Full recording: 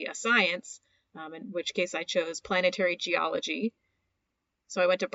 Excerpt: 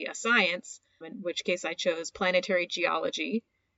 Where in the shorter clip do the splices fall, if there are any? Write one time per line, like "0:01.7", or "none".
0:01.0